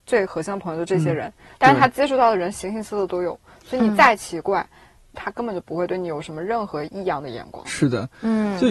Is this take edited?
yes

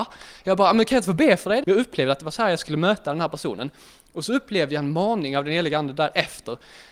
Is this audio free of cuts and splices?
no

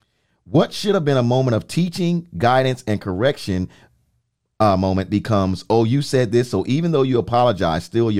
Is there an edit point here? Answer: no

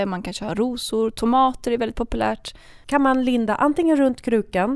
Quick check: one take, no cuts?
no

